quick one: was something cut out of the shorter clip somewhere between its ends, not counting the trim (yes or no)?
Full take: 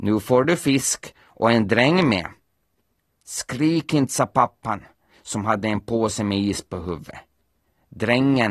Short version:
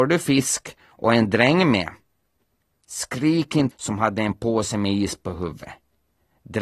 yes